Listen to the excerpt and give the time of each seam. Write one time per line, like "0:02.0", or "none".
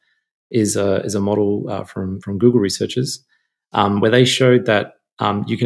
none